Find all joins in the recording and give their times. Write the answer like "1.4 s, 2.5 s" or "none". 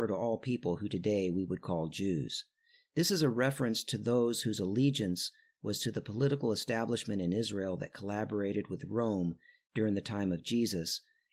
none